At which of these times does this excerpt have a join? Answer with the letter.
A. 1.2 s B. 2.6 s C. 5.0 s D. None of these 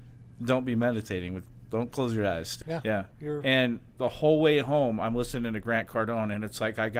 B